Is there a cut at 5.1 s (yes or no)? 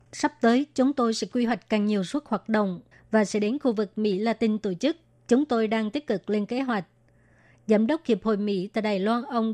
no